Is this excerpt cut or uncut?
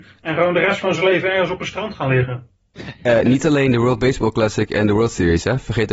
uncut